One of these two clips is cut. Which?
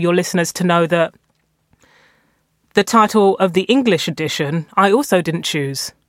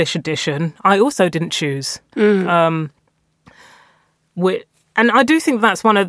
second; 1 cut; at 2.1 s

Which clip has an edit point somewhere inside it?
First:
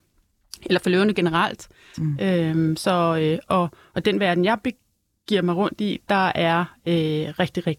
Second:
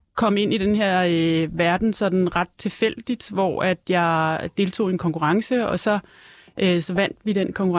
first; 1 cut; at 1.9 s

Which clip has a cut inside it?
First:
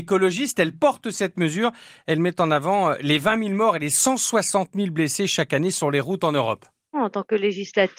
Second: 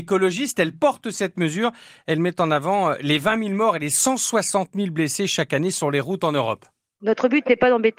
first; 1 cut; at 6.9 s

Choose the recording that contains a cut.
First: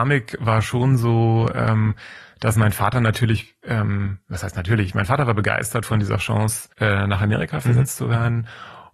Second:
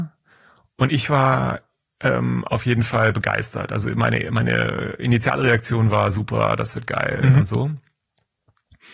first; 1 cut; at 6.7 s

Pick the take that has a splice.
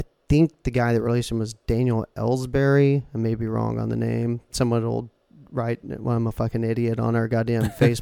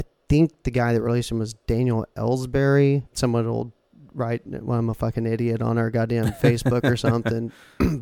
second; 1 cut; at 3.1 s

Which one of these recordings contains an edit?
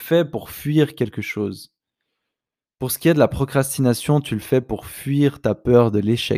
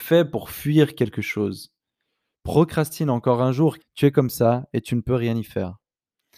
second; 2 cuts; at 2.3 s, 3.8 s

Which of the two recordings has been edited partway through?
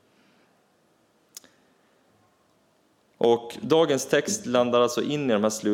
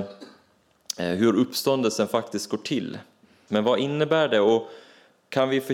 second; 1 cut; at 3.5 s

